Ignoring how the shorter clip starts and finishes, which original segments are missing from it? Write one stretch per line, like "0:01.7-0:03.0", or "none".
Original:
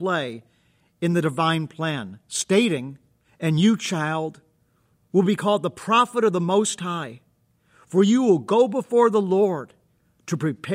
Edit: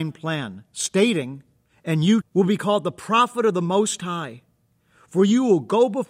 0:03.8-0:05.0

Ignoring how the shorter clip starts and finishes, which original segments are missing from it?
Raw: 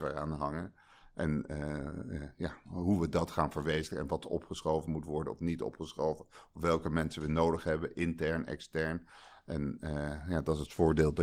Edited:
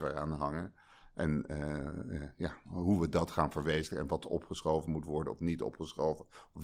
none

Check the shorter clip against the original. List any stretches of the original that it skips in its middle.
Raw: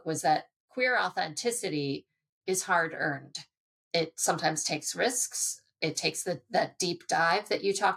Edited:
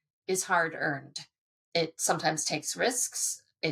none

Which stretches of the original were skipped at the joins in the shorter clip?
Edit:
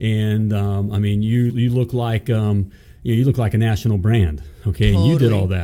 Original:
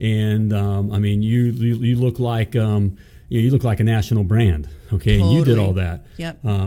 0:01.5-0:01.8

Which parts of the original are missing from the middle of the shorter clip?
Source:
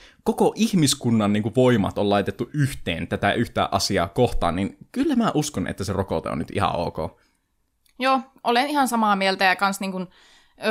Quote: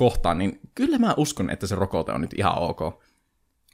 none

